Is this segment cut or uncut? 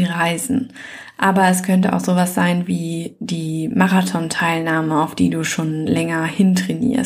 uncut